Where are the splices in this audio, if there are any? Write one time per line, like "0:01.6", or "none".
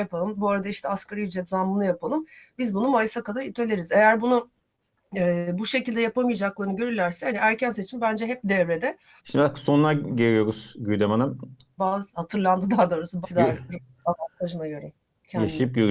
0:09.2
0:11.8
0:13.2